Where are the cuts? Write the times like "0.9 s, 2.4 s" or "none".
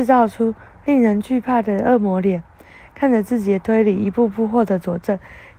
none

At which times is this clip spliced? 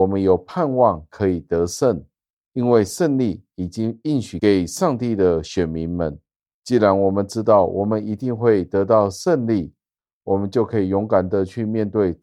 none

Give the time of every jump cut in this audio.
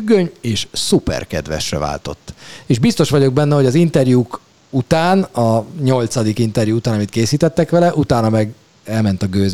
none

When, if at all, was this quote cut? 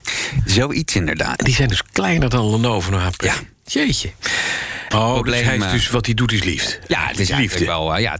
1.4 s, 4.9 s

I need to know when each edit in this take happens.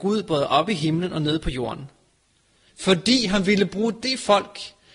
2.7 s

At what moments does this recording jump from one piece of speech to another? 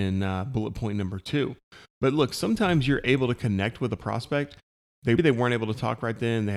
5.2 s

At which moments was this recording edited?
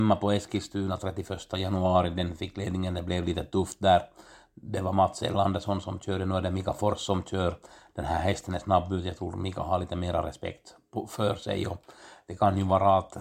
none

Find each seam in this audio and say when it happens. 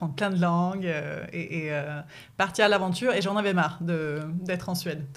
none

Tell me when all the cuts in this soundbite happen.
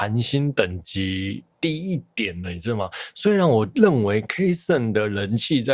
1.5 s

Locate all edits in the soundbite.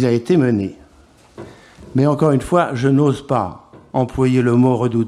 none

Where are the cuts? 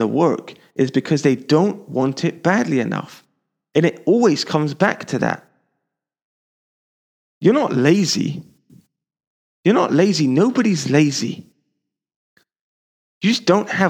none

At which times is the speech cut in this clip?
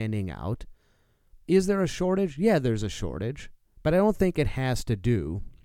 1.5 s

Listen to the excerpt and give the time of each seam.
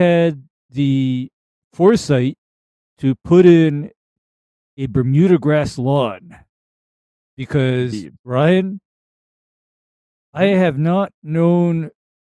none

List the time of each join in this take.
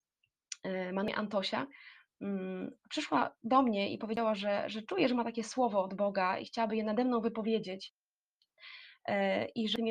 none

